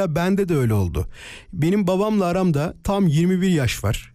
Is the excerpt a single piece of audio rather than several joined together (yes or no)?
yes